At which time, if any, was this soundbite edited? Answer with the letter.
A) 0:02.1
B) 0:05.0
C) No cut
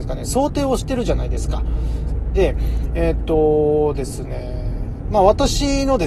A